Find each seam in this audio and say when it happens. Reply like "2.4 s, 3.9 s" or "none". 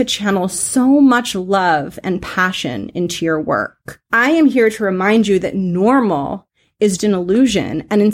4.1 s, 7.0 s